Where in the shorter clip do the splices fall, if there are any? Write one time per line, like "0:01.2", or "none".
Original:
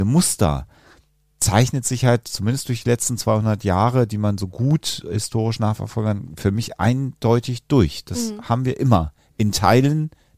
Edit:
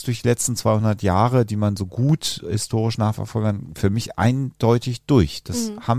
none